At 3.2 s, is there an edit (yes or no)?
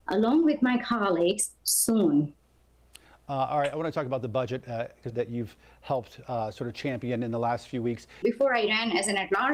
no